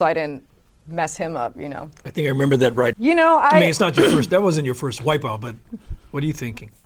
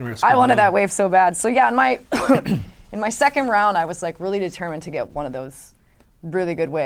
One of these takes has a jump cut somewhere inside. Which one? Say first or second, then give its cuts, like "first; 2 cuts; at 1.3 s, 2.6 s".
first; 1 cut; at 2.9 s